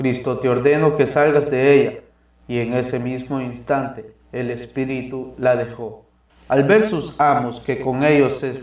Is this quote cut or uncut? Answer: uncut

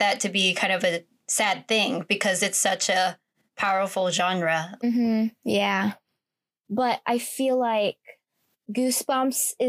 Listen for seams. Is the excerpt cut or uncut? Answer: uncut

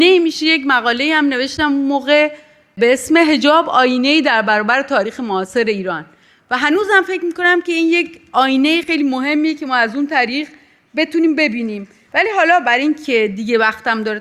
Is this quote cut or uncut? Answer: cut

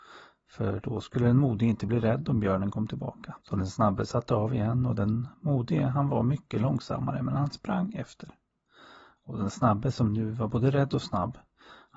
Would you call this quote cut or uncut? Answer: cut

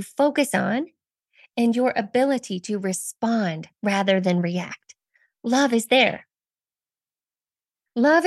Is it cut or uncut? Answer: uncut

